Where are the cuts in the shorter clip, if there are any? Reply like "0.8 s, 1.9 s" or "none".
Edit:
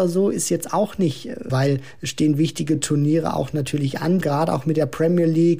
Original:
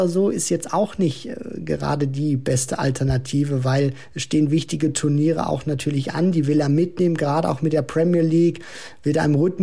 1.5 s, 4.2 s